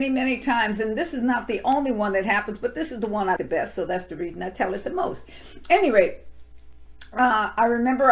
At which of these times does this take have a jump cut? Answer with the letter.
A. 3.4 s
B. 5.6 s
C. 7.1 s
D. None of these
A